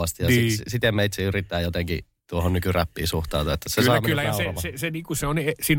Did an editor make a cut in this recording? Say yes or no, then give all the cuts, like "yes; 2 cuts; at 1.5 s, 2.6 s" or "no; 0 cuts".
no; 0 cuts